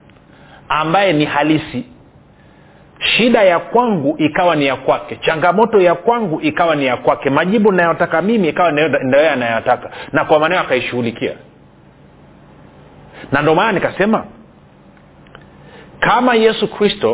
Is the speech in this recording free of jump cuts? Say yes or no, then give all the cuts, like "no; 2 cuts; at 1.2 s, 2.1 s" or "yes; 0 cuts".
yes; 0 cuts